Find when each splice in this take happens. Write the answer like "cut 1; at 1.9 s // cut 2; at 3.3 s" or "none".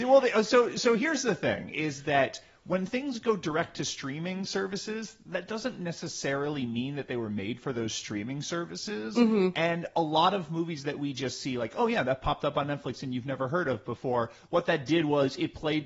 none